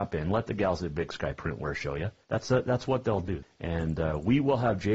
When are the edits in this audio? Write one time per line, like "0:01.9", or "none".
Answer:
0:02.2
0:03.4